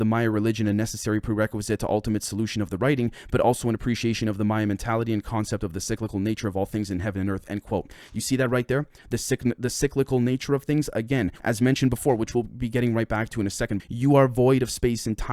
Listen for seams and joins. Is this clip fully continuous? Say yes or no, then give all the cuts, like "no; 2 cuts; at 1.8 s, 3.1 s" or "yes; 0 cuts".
no; 2 cuts; at 11.4 s, 13.8 s